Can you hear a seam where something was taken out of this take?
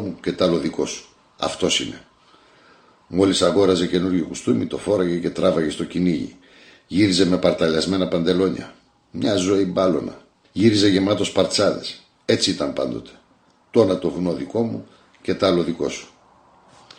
yes; 1 cut; at 10.4 s

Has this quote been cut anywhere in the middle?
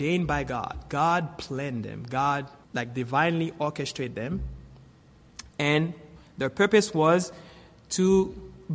yes; 1 cut; at 2.6 s

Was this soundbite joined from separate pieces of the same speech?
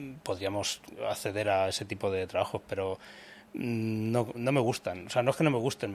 yes; 1 cut; at 4.3 s

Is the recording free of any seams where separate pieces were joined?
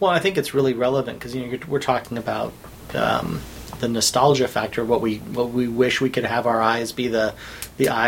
yes; 0 cuts

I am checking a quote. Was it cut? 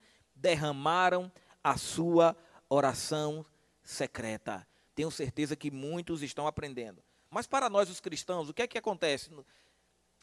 yes; 2 cuts; at 4.9 s, 7.3 s

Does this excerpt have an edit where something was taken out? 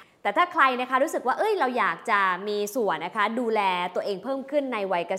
yes; 1 cut; at 3.0 s

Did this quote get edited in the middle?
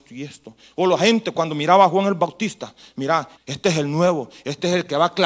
yes; 1 cut; at 3.4 s

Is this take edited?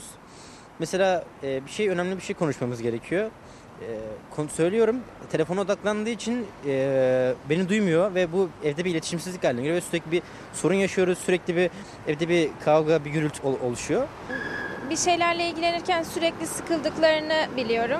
yes; 1 cut; at 13.4 s

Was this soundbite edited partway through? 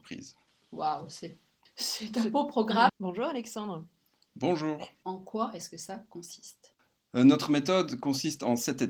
yes; 2 cuts; at 2.9 s, 5.0 s

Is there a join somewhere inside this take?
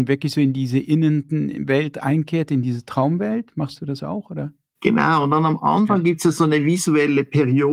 no; 0 cuts

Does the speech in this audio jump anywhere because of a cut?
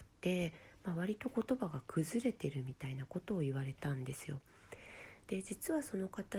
yes; 1 cut; at 5.3 s

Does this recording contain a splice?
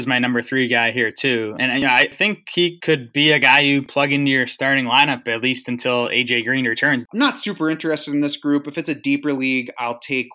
yes; 1 cut; at 7.1 s

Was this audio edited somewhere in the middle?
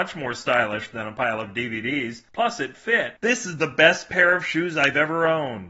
yes; 1 cut; at 3.2 s

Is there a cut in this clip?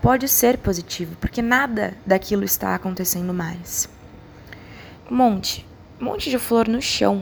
yes; 1 cut; at 5.0 s

